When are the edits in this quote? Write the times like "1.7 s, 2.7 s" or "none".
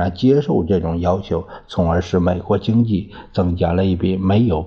none